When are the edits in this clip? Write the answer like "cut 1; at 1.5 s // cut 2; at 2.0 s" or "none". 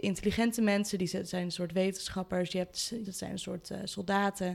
cut 1; at 3.0 s